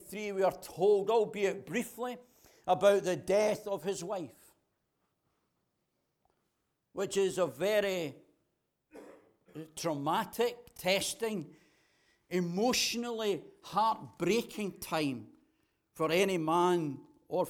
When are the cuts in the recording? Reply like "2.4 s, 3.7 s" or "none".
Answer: none

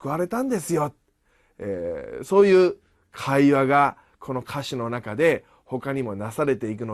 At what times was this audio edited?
none

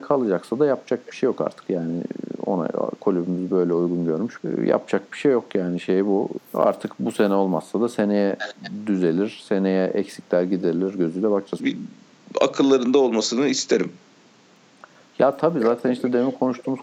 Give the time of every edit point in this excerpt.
4.4 s, 6.4 s, 11.6 s

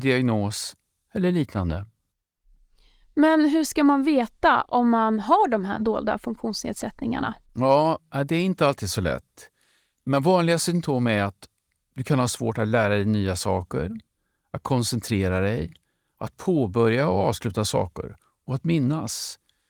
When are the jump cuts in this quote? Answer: none

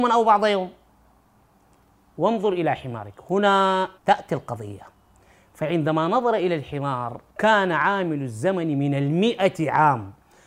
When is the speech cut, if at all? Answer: 4.0 s, 7.3 s

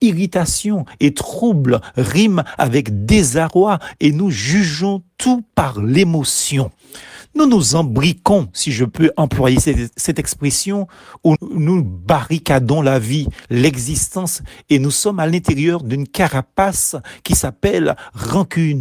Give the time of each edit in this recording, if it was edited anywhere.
11.4 s

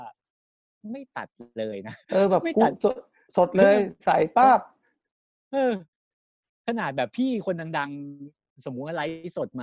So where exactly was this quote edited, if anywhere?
2.0 s

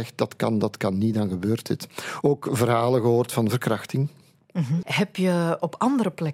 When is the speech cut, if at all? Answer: 2.2 s, 4.8 s

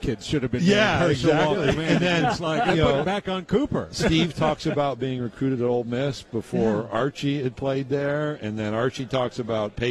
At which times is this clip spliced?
none

